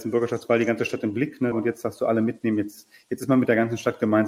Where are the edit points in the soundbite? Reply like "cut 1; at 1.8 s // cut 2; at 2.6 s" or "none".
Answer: cut 1; at 1.5 s